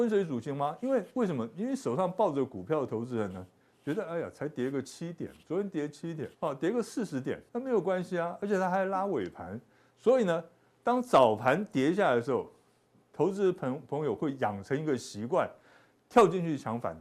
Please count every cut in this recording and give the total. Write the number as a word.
two